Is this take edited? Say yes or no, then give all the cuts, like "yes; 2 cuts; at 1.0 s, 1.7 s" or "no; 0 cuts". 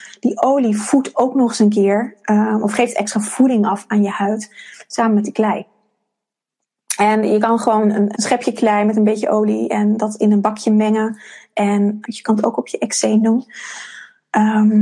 yes; 2 cuts; at 8.1 s, 12.0 s